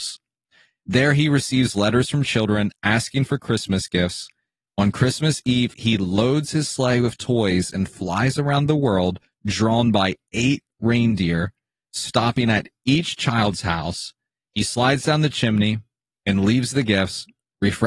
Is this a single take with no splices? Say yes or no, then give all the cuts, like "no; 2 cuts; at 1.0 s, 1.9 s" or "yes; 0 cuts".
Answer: yes; 0 cuts